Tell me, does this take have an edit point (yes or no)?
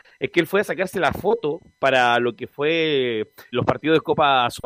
yes